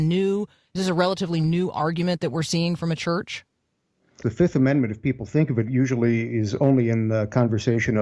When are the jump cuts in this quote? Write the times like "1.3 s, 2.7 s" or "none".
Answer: 4.2 s